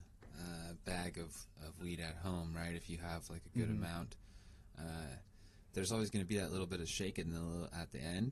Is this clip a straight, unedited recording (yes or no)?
yes